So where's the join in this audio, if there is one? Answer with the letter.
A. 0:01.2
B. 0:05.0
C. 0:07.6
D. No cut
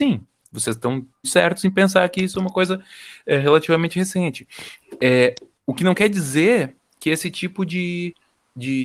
A